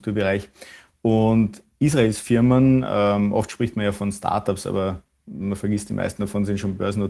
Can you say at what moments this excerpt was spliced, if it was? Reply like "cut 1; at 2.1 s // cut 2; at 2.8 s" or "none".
none